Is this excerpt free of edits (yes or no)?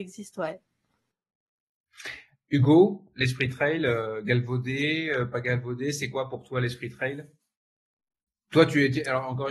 yes